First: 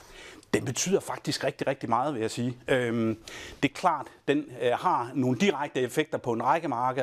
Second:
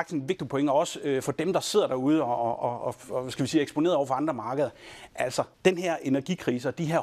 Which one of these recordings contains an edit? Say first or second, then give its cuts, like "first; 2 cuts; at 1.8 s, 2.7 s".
second; 1 cut; at 5.5 s